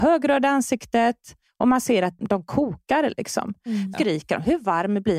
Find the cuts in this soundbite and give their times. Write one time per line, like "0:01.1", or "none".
0:02.2
0:03.9